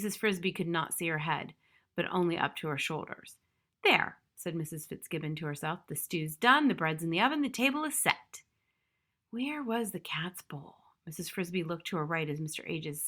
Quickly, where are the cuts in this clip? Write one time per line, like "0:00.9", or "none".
none